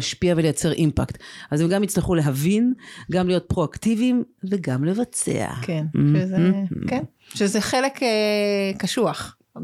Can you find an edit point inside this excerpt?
no; 0 cuts

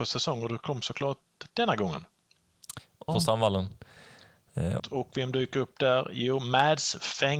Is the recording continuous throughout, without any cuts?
no; 2 cuts; at 3.1 s, 4.8 s

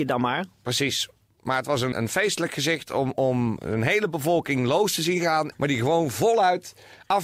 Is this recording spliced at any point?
yes; 2 cuts; at 1.9 s, 5.5 s

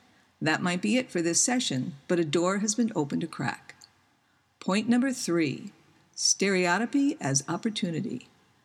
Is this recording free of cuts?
yes; 0 cuts

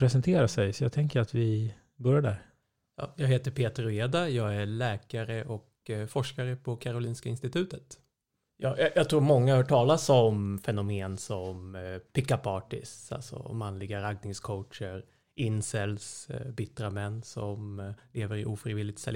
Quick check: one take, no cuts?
no; 1 cut; at 8.5 s

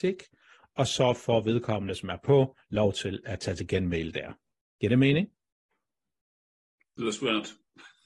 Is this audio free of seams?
yes; 0 cuts

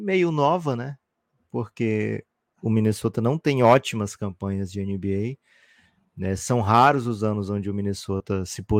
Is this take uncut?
yes; 0 cuts

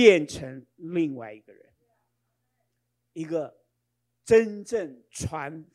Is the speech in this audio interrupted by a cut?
no; 0 cuts

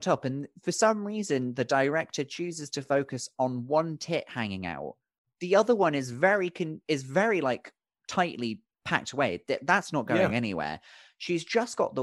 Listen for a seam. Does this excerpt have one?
no; 0 cuts

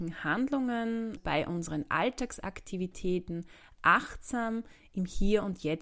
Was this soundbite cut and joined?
yes; 1 cut; at 1.2 s

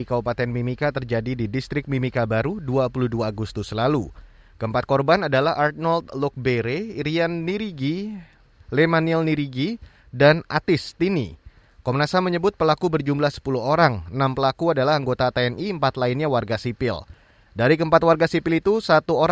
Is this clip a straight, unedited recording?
yes; 0 cuts

